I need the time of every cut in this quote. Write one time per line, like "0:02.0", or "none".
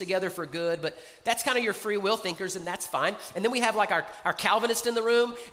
none